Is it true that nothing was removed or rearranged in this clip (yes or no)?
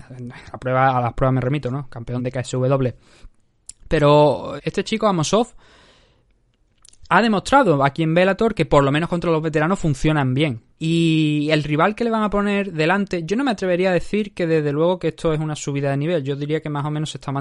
no